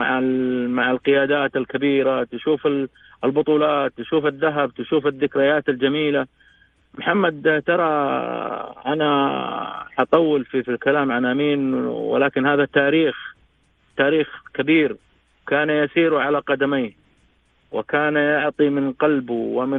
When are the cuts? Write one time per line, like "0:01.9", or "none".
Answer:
0:10.6